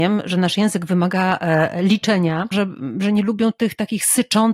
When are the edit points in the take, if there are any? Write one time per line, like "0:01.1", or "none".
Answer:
0:02.5